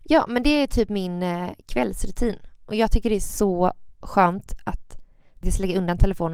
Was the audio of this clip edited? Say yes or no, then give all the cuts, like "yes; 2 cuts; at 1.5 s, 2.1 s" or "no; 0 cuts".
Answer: no; 0 cuts